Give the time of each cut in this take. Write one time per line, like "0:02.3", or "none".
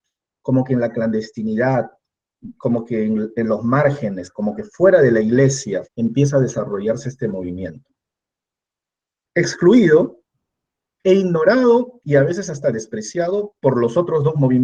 0:05.8